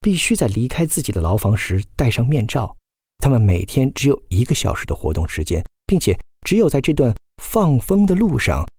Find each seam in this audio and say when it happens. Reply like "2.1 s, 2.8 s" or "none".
3.0 s